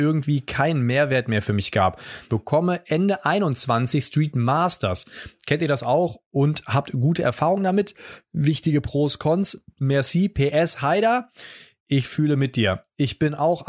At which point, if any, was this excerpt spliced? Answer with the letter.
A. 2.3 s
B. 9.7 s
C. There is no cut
A